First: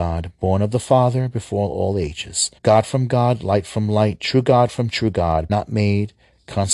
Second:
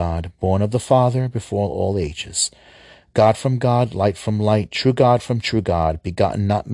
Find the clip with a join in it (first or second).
first